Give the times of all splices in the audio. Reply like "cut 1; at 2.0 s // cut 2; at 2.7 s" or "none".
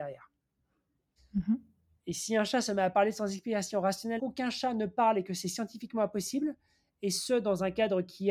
cut 1; at 1.2 s // cut 2; at 4.2 s